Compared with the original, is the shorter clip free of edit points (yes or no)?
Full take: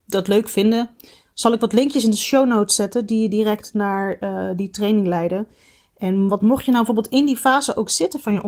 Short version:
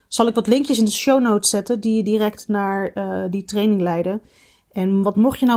yes